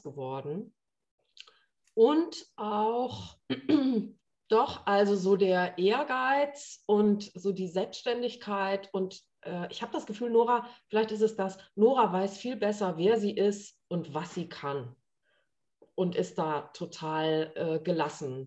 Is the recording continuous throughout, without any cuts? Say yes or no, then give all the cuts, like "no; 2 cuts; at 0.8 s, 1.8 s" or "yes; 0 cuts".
no; 1 cut; at 3.4 s